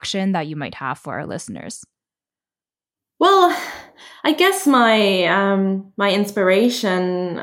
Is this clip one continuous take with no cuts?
yes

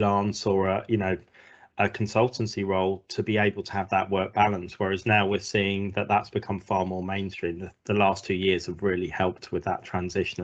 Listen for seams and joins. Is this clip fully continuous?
yes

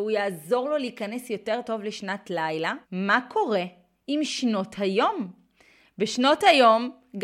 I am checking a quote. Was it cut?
yes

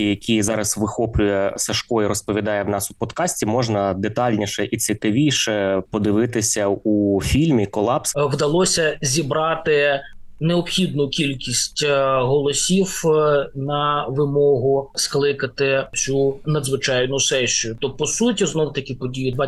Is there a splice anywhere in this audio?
yes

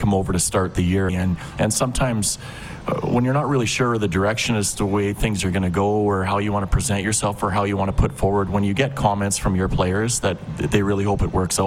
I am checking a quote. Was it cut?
yes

